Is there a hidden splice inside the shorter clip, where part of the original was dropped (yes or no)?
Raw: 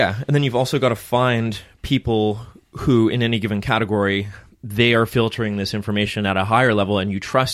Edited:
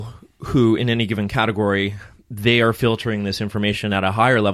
no